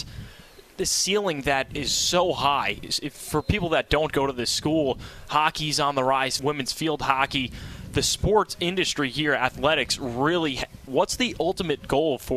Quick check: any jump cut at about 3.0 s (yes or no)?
no